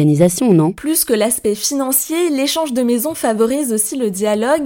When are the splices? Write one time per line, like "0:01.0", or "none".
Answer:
none